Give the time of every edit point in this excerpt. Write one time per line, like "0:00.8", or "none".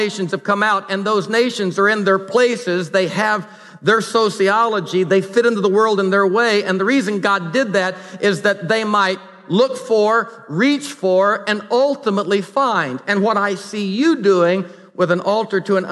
none